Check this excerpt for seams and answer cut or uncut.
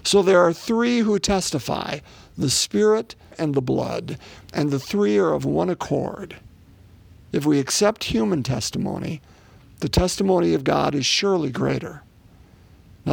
cut